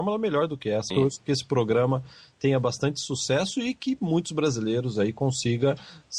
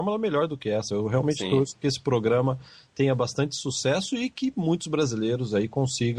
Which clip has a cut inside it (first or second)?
first